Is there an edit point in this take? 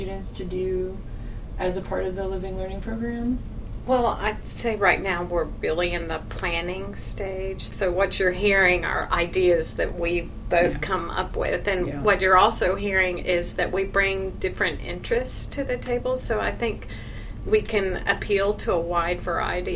no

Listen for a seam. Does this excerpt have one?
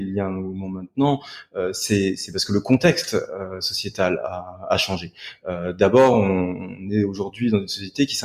no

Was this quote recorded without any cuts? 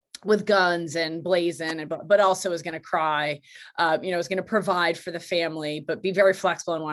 yes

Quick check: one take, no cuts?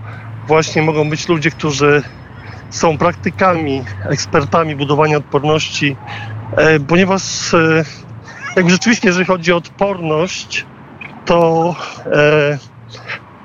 yes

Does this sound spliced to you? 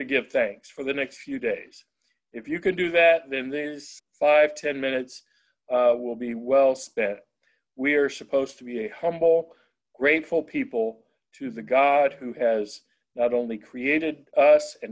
yes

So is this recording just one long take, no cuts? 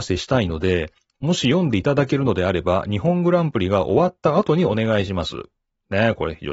yes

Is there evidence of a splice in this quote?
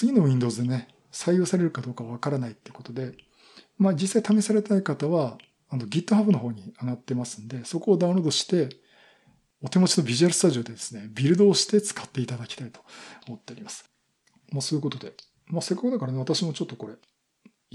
no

